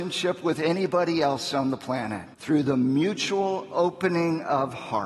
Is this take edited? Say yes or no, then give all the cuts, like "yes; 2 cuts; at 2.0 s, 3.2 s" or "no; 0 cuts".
yes; 1 cut; at 2.3 s